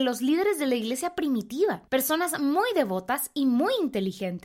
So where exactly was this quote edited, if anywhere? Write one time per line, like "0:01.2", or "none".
0:01.9